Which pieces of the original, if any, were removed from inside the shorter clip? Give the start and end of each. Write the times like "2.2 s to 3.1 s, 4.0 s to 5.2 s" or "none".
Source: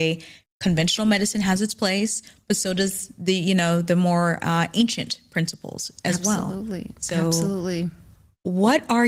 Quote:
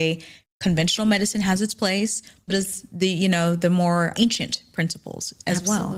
2.5 s to 2.7 s, 4.4 s to 4.7 s